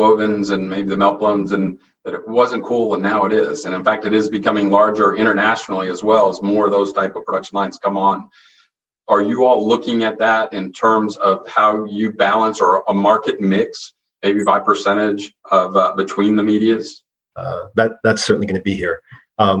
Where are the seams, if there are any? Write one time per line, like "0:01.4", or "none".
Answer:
0:15.4
0:17.3